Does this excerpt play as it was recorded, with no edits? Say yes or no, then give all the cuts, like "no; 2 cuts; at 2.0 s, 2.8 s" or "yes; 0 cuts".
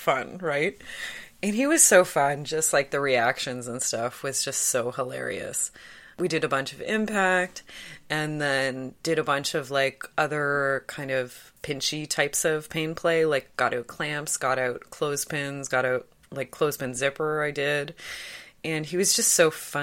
yes; 0 cuts